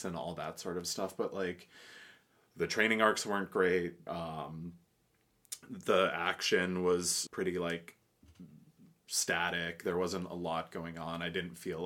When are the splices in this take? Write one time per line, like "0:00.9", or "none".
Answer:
0:04.1
0:07.3